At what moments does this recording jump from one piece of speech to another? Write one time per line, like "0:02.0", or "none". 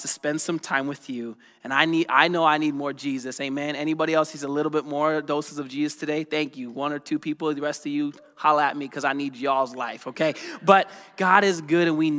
none